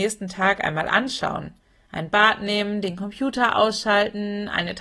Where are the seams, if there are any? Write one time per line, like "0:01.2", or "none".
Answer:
none